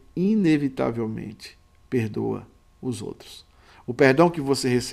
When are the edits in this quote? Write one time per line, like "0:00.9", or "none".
none